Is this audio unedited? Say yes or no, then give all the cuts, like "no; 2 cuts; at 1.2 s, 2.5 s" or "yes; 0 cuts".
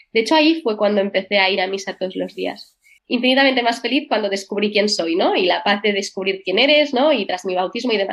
no; 1 cut; at 3.0 s